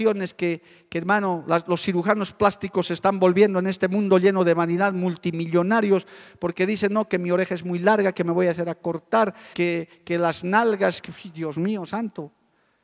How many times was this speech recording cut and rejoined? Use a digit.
2